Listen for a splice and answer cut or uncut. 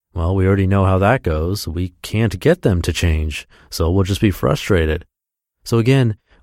uncut